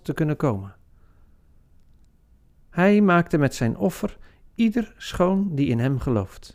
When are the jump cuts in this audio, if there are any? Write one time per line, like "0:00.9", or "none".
0:02.6